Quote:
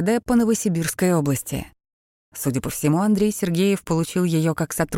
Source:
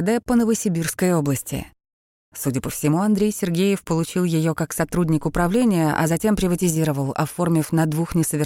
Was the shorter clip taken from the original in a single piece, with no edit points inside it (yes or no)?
yes